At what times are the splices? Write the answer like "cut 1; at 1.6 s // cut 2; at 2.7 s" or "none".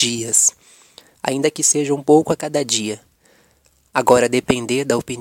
cut 1; at 1.2 s